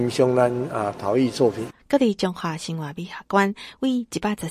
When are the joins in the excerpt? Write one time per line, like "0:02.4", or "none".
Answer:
0:01.8